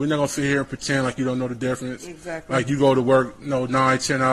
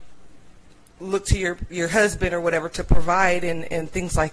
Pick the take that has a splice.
second; 1 cut; at 1.7 s

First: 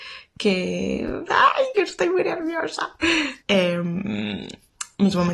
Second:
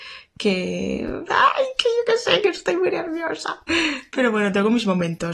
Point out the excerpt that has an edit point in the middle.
first; 2 cuts; at 1.7 s, 3.4 s

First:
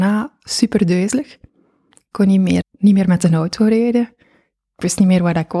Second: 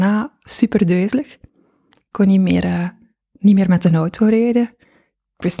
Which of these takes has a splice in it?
first; 1 cut; at 2.6 s

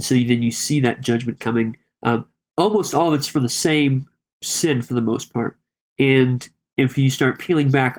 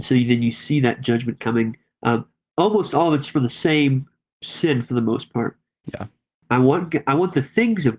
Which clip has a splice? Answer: second; 1 cut; at 5.8 s

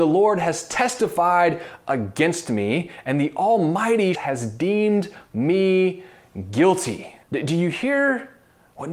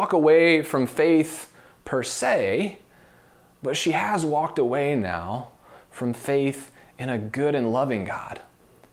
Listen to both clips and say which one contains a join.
first; 2 cuts; at 4.1 s, 7.2 s

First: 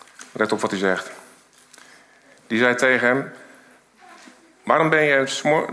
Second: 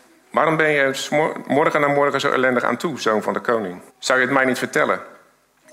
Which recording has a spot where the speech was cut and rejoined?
second; 1 cut; at 3.9 s

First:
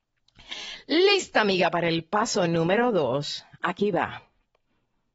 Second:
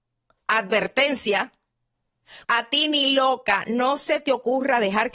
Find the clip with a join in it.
second; 1 cut; at 2.4 s

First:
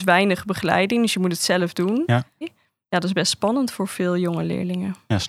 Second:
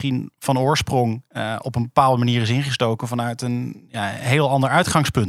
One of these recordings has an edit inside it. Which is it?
first; 1 cut; at 2.4 s

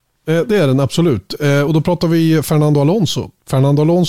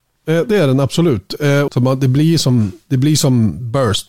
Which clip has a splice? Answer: second; 1 cut; at 1.7 s

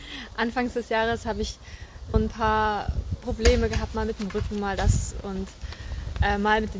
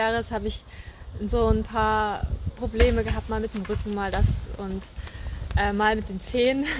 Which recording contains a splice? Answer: first; 1 cut; at 2.1 s

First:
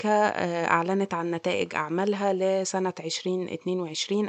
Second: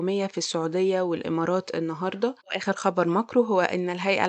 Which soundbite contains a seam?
second; 1 cut; at 2.4 s

